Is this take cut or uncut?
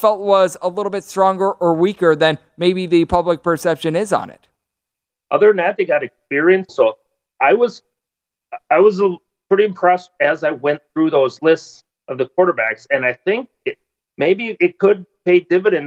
cut